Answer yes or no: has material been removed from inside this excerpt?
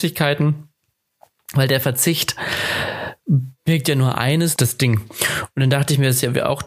yes